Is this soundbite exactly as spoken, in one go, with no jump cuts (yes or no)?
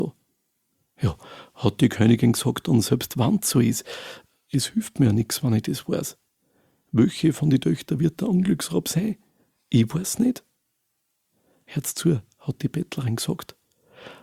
yes